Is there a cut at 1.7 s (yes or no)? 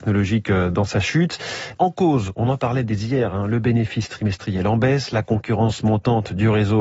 yes